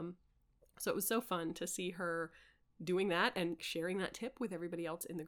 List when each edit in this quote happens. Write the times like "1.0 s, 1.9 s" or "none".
3.6 s